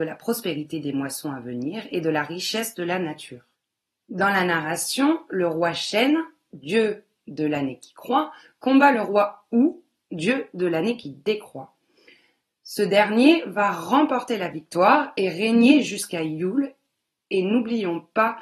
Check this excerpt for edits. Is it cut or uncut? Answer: uncut